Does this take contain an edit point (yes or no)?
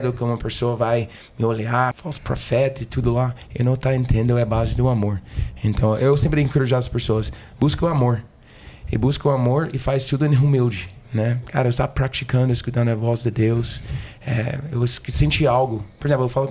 yes